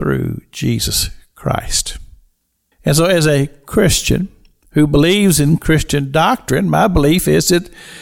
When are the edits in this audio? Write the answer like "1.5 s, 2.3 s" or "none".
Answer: 2.7 s